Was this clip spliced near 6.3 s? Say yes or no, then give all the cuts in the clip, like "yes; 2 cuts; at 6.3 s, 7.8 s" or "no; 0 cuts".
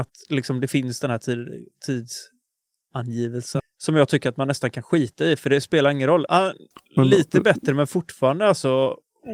yes; 2 cuts; at 3.6 s, 6.3 s